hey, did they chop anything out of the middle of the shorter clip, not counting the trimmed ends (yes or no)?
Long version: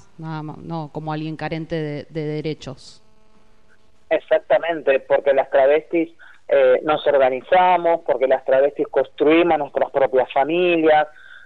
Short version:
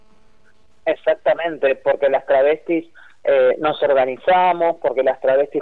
no